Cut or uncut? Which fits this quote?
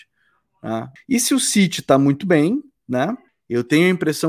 cut